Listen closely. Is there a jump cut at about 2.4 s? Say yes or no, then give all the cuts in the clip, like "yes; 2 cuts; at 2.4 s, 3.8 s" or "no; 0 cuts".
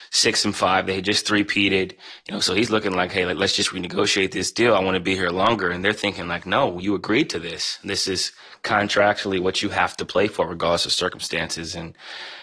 no; 0 cuts